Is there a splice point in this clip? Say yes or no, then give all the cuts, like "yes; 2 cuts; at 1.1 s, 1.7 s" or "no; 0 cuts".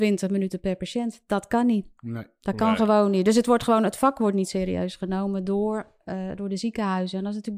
no; 0 cuts